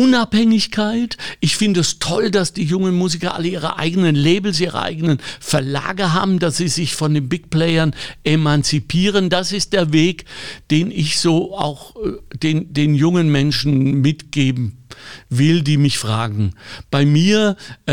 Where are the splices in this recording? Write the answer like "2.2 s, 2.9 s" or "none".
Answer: none